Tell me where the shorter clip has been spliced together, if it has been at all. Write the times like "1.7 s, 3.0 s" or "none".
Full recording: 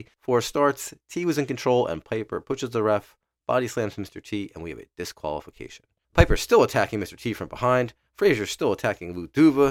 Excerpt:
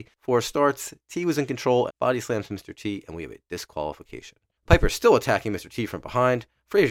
1.9 s